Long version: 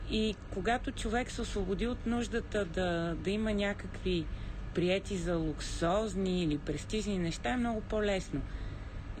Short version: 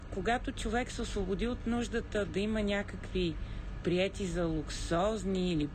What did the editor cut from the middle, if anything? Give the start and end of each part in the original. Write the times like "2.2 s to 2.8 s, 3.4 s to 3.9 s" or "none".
2.7 s to 3.2 s